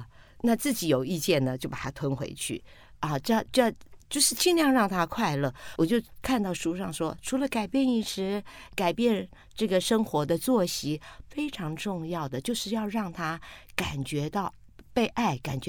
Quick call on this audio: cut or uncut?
cut